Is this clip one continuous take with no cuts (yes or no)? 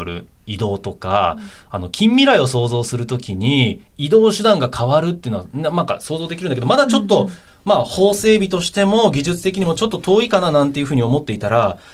yes